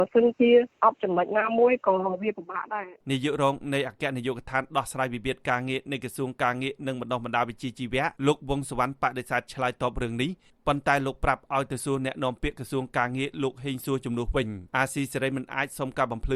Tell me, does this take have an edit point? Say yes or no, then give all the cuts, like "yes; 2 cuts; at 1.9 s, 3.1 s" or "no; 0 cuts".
yes; 3 cuts; at 3.0 s, 8.2 s, 14.7 s